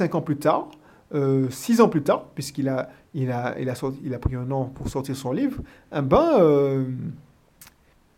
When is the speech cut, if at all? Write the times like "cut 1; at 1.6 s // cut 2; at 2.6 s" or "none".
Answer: none